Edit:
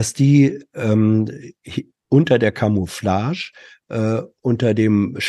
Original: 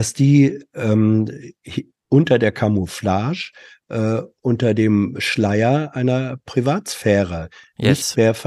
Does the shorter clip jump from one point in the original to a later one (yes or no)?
no